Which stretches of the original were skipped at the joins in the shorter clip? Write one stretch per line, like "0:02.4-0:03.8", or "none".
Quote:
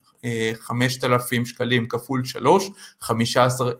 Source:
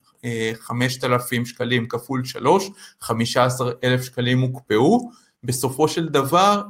none